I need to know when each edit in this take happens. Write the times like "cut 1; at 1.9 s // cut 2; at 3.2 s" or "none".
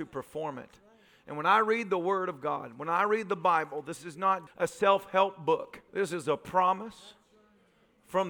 cut 1; at 4.5 s // cut 2; at 5.9 s